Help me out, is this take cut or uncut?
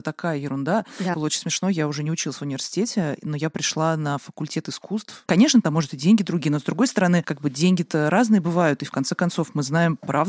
cut